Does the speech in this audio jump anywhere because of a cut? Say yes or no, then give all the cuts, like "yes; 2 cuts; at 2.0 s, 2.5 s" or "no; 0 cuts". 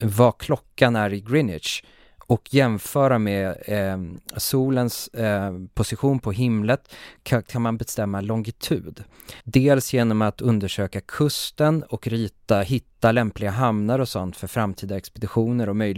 yes; 1 cut; at 9.4 s